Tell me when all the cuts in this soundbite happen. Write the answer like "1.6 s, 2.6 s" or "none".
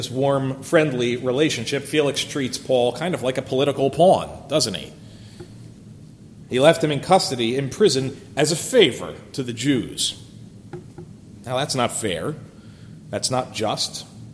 none